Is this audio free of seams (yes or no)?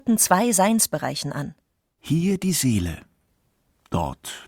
no